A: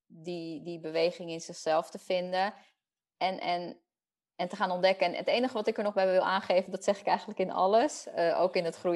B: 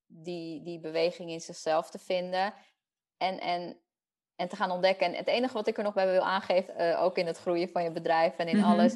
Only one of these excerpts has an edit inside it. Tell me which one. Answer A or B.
B